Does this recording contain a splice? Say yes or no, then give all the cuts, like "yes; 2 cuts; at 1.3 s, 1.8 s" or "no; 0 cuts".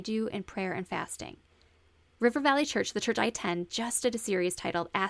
no; 0 cuts